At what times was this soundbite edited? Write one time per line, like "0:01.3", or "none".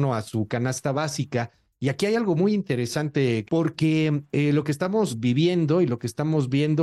0:03.4